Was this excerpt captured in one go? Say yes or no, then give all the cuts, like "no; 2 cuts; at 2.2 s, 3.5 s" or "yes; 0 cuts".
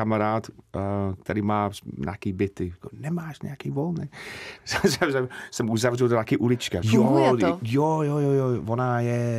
no; 2 cuts; at 4.6 s, 6.8 s